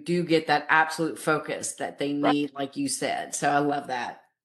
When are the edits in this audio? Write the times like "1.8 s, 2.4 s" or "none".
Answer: none